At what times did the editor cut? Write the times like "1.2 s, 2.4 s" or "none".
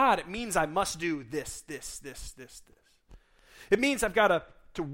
2.6 s